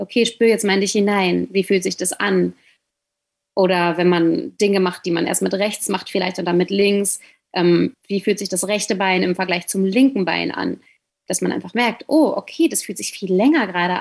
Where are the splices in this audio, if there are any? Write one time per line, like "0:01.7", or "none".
0:08.0